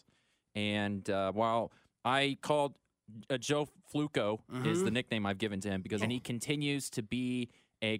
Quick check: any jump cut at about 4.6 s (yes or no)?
no